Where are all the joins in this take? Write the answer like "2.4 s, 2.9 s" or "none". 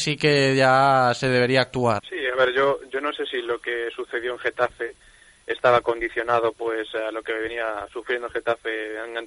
2.0 s